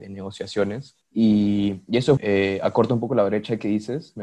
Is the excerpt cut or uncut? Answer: cut